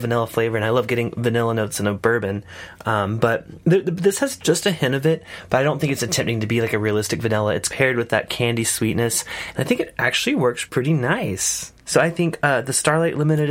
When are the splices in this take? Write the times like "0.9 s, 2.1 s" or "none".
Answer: none

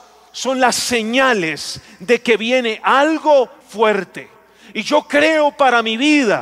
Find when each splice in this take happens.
3.6 s

